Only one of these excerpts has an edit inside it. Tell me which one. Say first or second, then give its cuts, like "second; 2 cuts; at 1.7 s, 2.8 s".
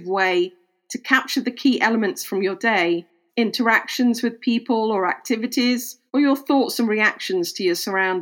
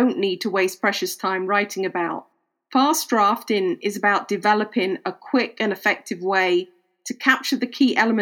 first; 2 cuts; at 3.3 s, 6.1 s